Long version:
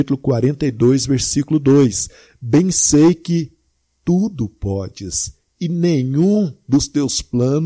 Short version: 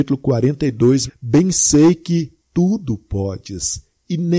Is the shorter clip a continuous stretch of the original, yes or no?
no